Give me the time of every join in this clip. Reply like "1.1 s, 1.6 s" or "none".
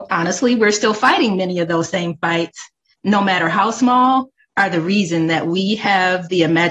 2.9 s